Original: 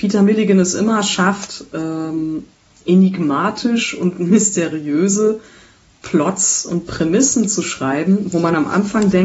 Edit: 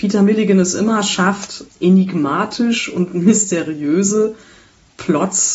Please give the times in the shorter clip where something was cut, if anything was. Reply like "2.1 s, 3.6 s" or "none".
1.7 s